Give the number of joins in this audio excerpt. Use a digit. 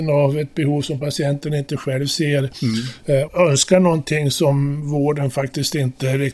1